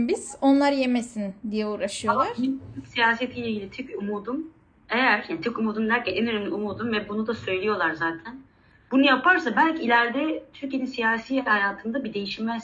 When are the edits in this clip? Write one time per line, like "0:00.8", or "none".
0:08.7